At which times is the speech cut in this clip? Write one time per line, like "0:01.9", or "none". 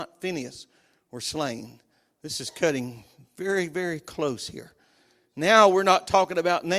none